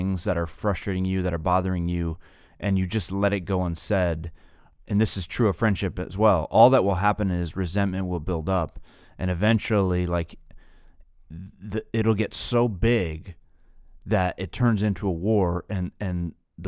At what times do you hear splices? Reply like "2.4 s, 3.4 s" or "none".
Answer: none